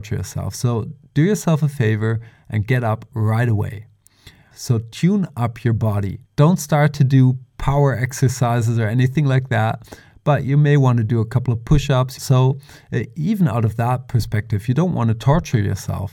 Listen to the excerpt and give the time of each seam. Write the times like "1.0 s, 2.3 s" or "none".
4.5 s, 6.3 s, 12.2 s